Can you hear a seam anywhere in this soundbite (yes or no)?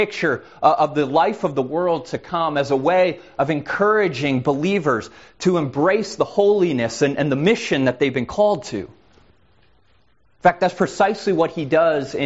no